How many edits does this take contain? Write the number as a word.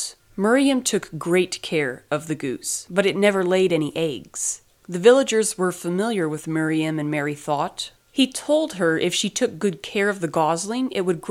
two